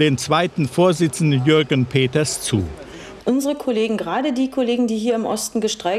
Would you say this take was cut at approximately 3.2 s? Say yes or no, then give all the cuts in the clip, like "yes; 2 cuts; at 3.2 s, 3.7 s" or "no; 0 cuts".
yes; 1 cut; at 3.2 s